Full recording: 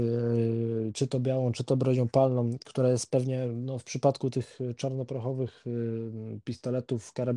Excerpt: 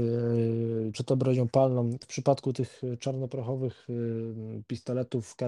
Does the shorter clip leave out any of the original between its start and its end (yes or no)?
yes